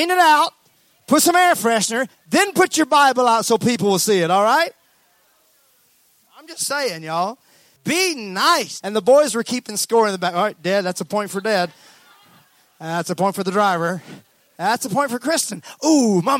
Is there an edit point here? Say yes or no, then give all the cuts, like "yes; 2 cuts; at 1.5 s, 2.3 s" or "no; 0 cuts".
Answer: yes; 2 cuts; at 7.8 s, 8.8 s